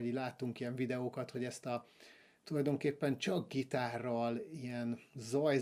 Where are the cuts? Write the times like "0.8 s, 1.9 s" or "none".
none